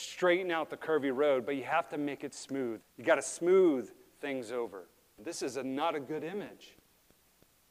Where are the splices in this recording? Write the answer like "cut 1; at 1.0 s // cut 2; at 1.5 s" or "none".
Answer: cut 1; at 2.8 s // cut 2; at 5.2 s